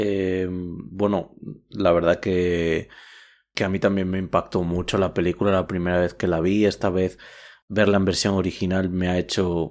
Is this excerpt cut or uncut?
uncut